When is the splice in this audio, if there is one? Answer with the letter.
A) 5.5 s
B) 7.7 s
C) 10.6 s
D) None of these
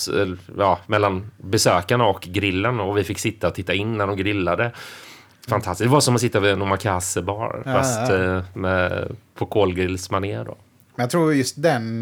A